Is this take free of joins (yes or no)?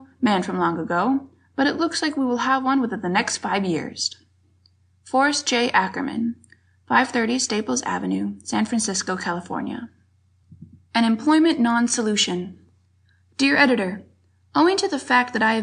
yes